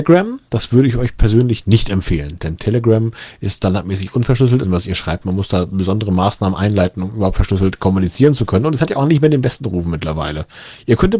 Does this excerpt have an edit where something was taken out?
yes; 1 cut; at 4.6 s

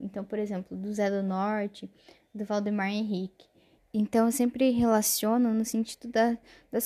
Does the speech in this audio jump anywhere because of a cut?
yes; 1 cut; at 3.8 s

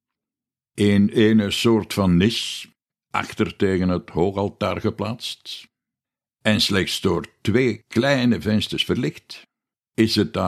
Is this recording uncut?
yes; 0 cuts

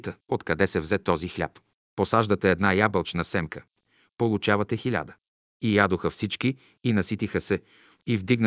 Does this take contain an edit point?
yes; 2 cuts; at 1.8 s, 5.5 s

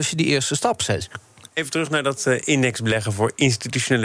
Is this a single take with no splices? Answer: no; 1 cut; at 1.5 s

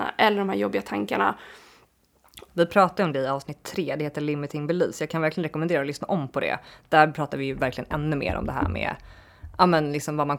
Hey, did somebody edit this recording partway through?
yes; 1 cut; at 2.5 s

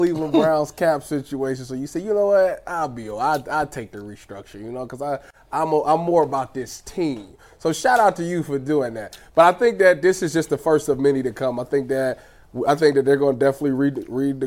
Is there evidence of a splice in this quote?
no; 0 cuts

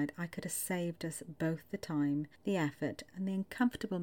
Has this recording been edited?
yes; 1 cut; at 2.3 s

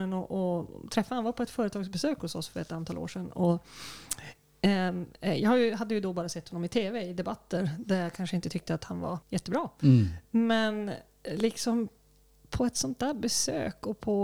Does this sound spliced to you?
yes; 1 cut; at 9.2 s

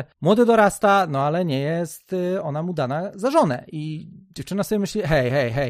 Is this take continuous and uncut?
yes; 0 cuts

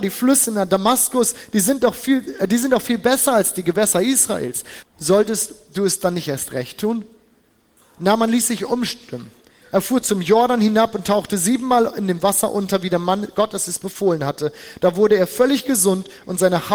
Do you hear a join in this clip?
yes; 1 cut; at 4.8 s

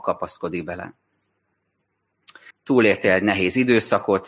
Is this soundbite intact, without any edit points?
no; 1 cut; at 2.5 s

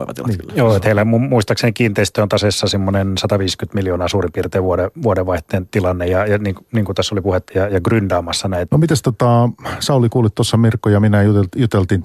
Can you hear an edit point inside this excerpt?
yes; 2 cuts; at 7.5 s, 8.7 s

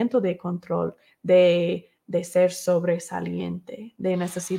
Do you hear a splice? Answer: no; 0 cuts

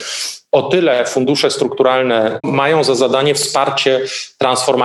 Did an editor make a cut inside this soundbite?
yes; 1 cut; at 2.4 s

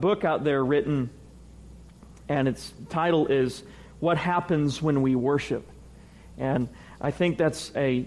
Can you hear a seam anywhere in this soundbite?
no; 0 cuts

